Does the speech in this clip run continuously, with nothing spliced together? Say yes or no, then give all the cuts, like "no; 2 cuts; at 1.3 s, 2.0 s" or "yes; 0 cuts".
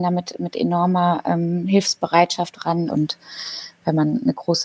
no; 1 cut; at 2.9 s